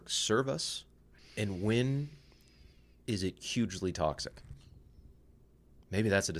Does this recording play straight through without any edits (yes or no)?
no